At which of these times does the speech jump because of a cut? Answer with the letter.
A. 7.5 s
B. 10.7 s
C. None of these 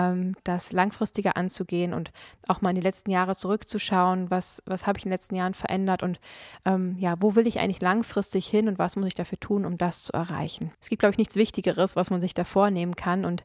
B